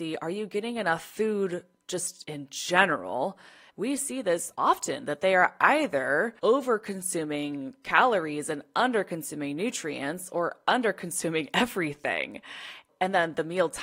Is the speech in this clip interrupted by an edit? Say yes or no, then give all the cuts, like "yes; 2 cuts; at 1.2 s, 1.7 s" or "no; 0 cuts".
yes; 2 cuts; at 3.7 s, 6.4 s